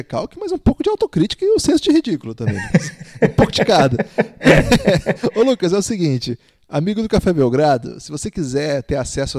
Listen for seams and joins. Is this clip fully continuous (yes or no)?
yes